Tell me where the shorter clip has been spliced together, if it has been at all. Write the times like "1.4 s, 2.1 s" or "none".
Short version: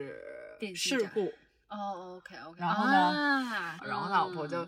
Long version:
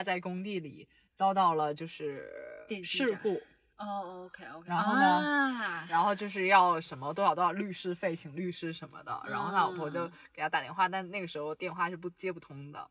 3.8 s